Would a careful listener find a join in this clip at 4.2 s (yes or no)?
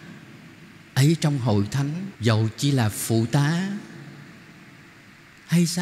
no